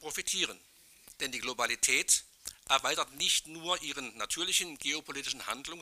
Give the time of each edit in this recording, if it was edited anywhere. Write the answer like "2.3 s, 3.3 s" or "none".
1.1 s

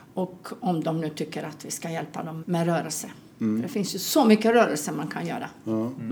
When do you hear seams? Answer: 2.4 s

